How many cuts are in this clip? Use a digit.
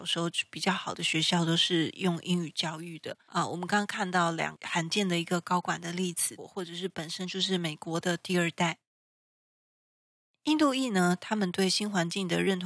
2